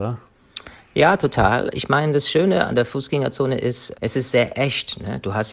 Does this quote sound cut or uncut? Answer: cut